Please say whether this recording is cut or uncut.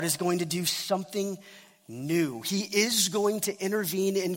uncut